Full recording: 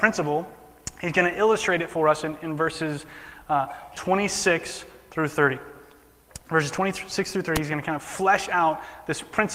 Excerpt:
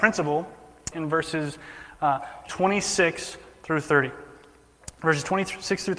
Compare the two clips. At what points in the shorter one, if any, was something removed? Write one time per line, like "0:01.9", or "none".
0:00.9